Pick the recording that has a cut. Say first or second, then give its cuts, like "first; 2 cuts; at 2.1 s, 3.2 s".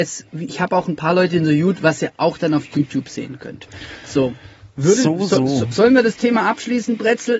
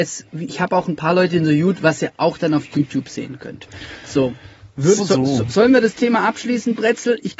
second; 1 cut; at 5.0 s